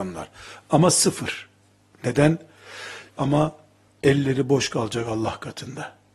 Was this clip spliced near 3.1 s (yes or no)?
yes